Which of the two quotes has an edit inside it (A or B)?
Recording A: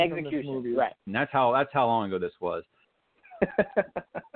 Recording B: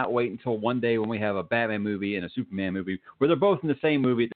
A